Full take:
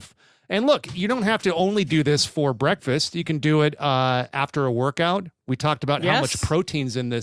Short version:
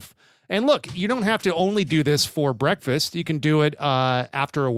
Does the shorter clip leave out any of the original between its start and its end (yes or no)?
no